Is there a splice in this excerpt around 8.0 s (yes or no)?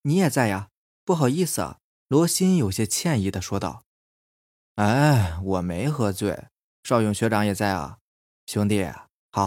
no